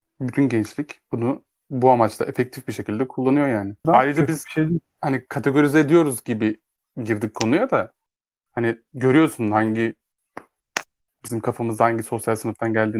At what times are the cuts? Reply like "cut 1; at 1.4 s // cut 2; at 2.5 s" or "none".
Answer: cut 1; at 3.8 s